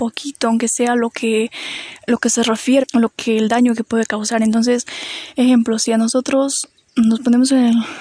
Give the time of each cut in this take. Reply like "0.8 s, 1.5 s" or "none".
2.8 s